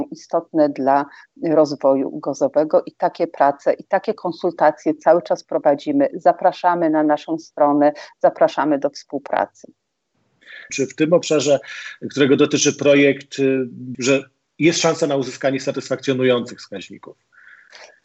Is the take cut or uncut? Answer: cut